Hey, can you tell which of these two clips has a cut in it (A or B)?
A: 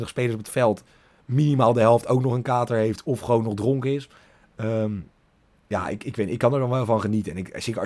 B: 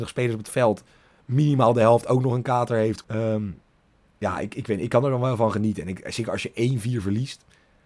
B